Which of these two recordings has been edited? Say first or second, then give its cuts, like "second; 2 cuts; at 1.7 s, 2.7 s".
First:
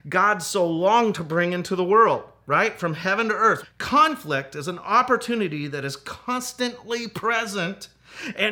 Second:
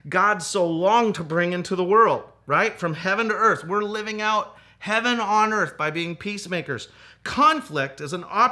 first; 1 cut; at 3.6 s